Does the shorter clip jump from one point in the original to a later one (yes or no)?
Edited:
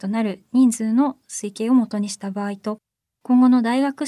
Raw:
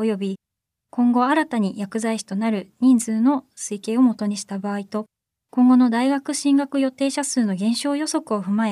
no